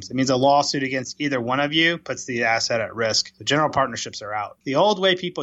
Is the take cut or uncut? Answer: uncut